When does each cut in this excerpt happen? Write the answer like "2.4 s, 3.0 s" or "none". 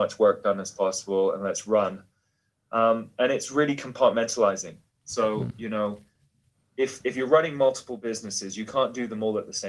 none